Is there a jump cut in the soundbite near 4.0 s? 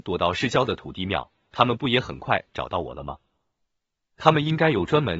yes; 1 cut; at 4.0 s

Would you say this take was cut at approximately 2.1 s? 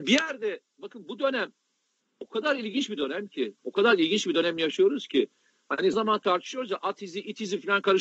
no; 1 cut; at 5.9 s

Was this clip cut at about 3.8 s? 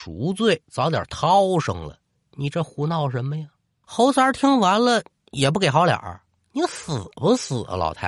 yes; 1 cut; at 3.8 s

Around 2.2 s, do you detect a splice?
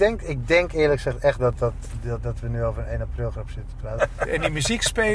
yes; 2 cuts; at 2.2 s, 4.0 s

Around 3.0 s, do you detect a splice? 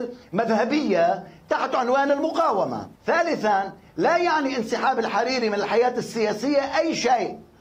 yes; 1 cut; at 3.0 s

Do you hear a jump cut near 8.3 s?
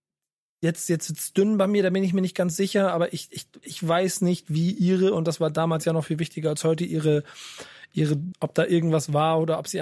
yes; 1 cut; at 8.3 s

